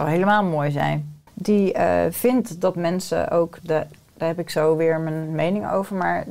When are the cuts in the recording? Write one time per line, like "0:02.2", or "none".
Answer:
0:01.3
0:03.6